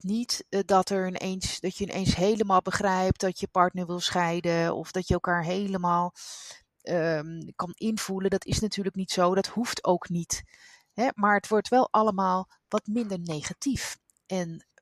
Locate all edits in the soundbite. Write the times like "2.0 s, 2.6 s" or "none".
none